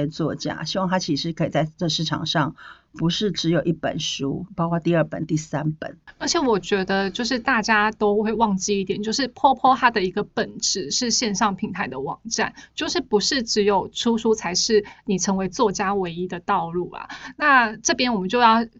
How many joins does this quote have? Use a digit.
0